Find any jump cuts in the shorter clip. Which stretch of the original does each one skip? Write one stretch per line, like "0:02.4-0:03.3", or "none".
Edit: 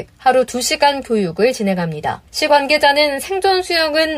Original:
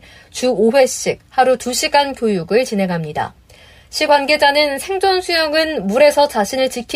0:03.4-0:03.9